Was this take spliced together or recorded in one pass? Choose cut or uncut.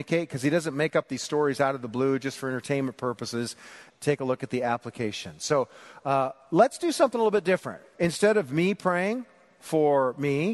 cut